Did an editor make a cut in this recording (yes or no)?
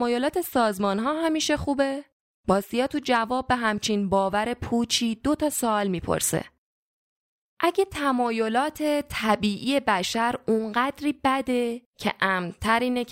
yes